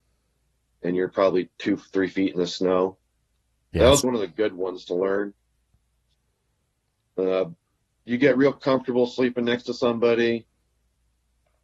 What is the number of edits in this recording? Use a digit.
1